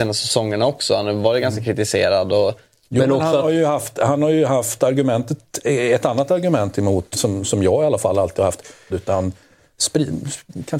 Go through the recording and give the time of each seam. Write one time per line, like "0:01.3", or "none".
0:07.1
0:08.9

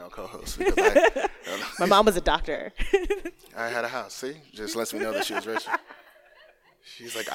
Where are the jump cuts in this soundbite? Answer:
none

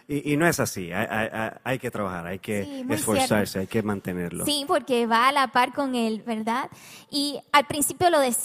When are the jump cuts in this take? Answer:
0:04.6
0:06.2

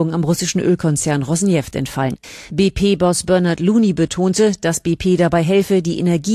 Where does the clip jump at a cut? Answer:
none

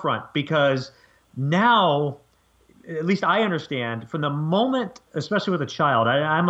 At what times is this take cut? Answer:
none

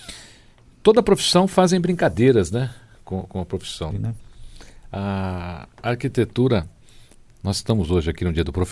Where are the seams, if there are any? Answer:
0:03.9

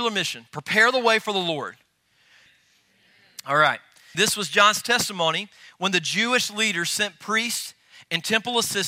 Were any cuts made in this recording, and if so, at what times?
0:02.5
0:04.1

